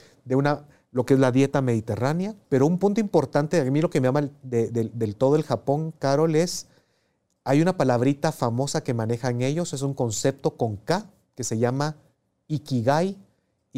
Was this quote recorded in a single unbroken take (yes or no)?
no